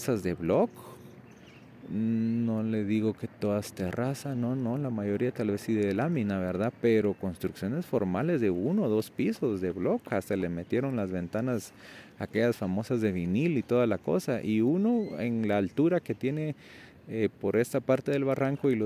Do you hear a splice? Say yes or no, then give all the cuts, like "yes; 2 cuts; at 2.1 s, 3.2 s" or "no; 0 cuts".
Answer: no; 0 cuts